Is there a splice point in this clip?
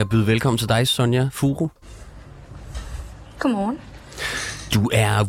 no; 0 cuts

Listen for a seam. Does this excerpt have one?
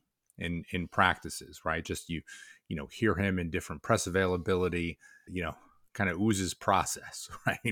yes; 2 cuts; at 1.8 s, 5.3 s

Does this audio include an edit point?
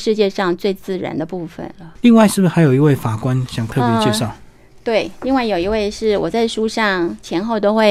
no; 0 cuts

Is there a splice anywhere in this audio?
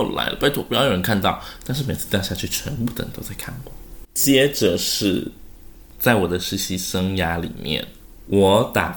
yes; 1 cut; at 4.0 s

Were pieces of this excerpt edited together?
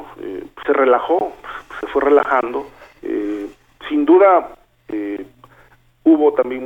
no; 0 cuts

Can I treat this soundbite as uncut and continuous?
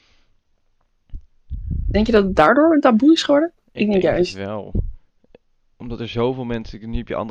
yes; 0 cuts

